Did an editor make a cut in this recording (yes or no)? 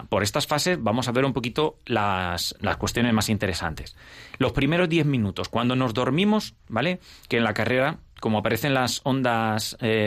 yes